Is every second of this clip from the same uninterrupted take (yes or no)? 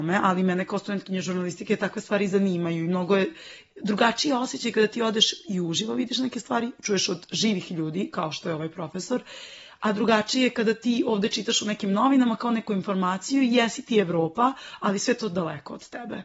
yes